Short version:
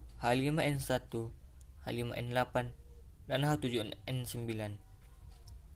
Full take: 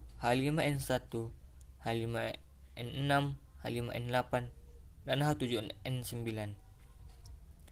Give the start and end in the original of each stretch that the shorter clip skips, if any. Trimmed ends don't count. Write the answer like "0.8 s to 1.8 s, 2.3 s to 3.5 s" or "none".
1.8 s to 3.5 s